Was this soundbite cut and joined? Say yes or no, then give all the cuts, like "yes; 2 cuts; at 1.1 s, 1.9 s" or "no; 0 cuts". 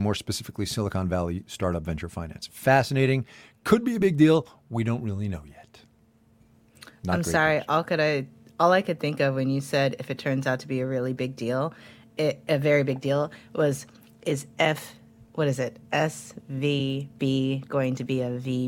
no; 0 cuts